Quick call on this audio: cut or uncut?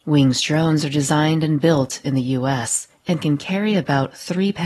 uncut